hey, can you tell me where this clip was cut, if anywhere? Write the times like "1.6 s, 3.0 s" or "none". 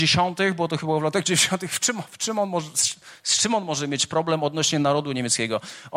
none